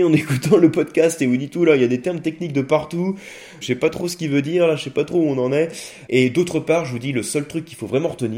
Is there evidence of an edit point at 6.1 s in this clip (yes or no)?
yes